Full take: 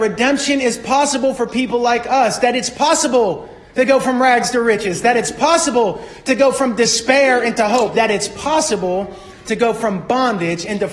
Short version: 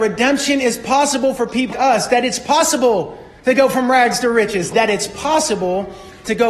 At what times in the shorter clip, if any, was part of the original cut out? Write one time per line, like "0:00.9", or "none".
0:01.7
0:04.7